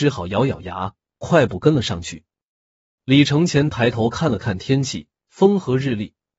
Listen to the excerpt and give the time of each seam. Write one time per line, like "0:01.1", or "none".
0:03.0